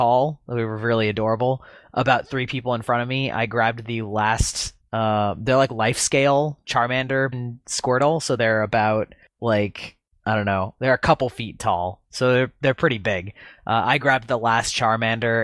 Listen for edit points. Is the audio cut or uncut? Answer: cut